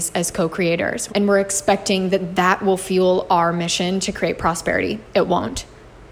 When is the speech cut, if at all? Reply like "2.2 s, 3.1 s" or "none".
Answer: 1.1 s